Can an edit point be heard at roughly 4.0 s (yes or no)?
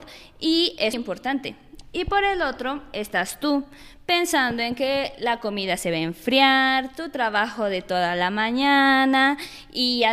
no